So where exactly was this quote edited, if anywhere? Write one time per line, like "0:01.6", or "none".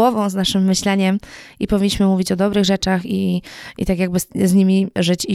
none